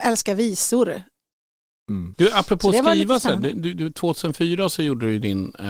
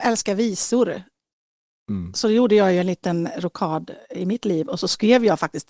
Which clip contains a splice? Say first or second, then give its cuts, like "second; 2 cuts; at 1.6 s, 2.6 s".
first; 1 cut; at 2.1 s